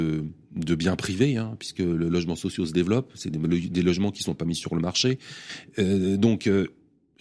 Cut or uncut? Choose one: uncut